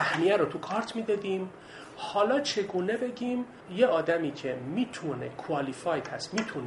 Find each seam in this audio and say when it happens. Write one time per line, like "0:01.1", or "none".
0:03.6

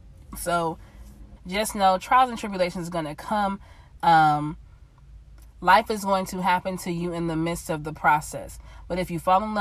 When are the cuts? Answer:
0:01.4
0:04.0

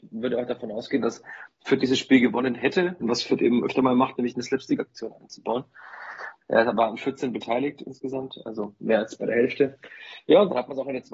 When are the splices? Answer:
0:03.0
0:06.4

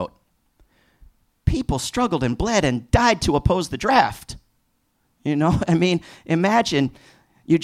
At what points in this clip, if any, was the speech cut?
none

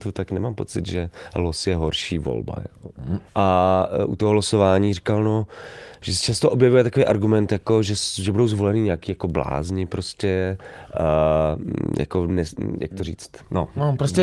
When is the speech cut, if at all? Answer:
0:03.3

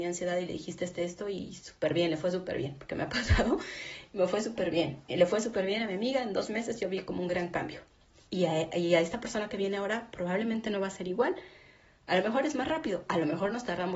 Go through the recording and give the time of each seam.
none

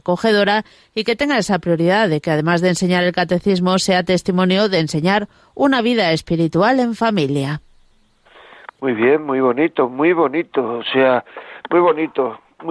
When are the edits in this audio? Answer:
none

